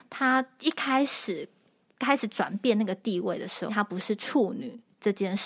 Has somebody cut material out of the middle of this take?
yes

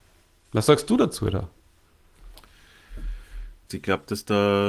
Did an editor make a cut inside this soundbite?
yes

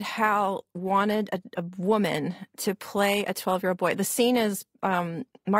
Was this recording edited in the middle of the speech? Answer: no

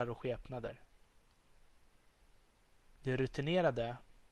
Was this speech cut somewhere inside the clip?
no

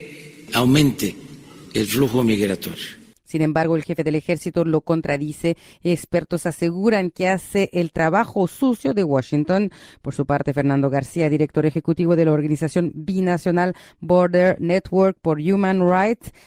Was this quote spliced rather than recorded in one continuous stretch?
no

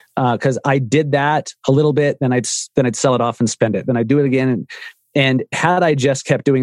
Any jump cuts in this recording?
no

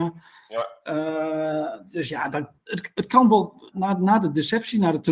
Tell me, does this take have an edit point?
yes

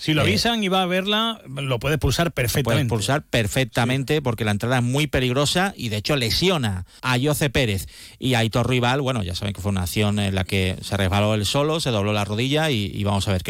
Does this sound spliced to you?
yes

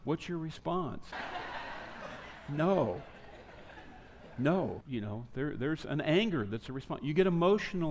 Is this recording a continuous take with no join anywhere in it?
no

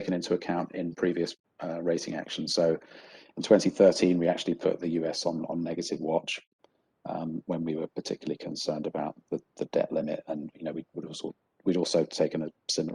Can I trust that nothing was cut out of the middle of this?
yes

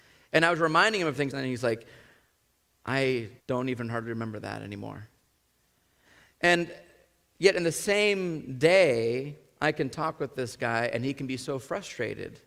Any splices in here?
yes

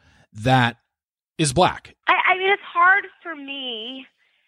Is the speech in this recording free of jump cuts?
no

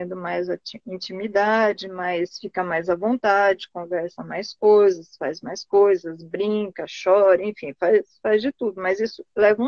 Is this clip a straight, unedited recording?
yes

